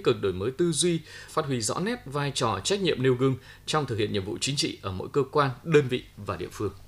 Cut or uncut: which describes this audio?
cut